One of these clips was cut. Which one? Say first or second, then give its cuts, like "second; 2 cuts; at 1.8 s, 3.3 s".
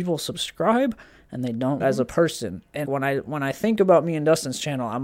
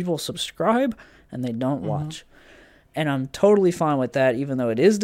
first; 2 cuts; at 1.8 s, 2.8 s